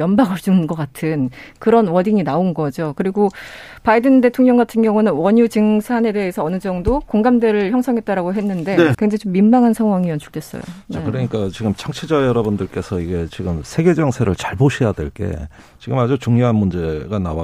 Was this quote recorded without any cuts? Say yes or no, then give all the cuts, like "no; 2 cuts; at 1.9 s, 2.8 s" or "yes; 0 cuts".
no; 1 cut; at 8.9 s